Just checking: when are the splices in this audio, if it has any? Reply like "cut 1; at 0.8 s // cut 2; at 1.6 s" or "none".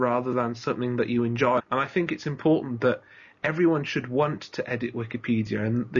cut 1; at 1.6 s